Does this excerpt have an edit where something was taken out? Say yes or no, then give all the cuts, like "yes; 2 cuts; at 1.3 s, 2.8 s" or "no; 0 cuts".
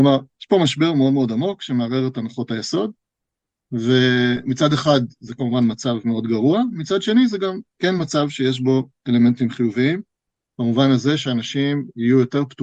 no; 0 cuts